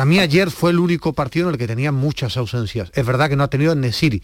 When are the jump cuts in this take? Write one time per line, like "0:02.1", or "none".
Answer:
none

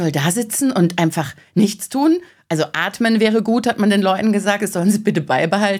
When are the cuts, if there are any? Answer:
none

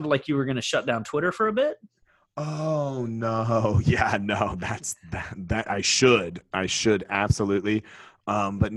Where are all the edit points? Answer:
none

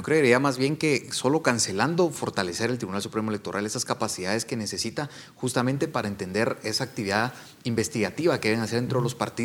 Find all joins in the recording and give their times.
none

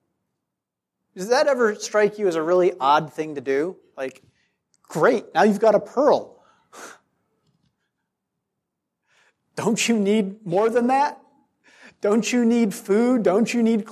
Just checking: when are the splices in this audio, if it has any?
none

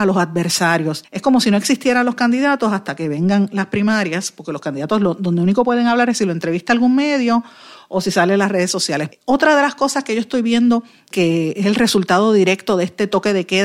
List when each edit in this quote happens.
0:01.0
0:09.1
0:11.1

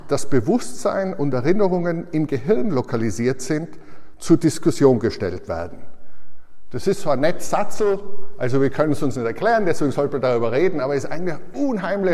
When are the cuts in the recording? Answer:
none

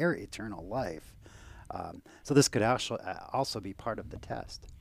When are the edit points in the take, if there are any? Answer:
none

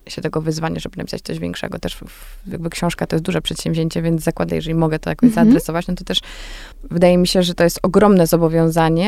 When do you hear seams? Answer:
0:04.5
0:06.7

